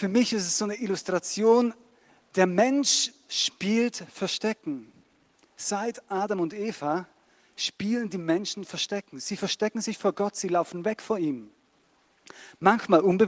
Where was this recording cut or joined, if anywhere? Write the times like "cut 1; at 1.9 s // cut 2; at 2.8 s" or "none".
none